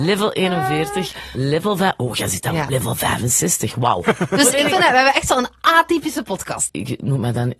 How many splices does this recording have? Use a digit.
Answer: 2